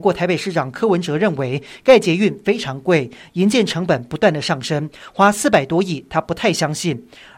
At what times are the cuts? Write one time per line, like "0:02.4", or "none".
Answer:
none